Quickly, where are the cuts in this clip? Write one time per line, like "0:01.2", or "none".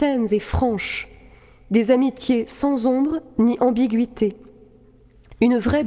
none